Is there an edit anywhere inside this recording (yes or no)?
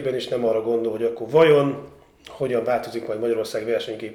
no